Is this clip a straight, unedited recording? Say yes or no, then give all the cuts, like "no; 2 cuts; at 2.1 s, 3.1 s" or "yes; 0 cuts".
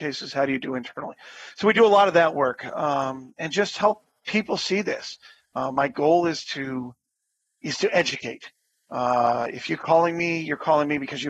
yes; 0 cuts